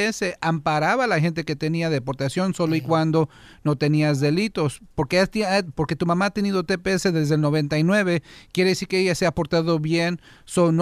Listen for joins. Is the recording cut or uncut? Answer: uncut